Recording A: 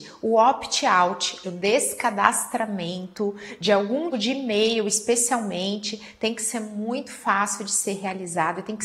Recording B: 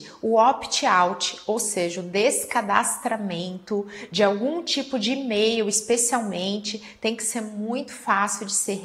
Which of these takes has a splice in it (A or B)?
A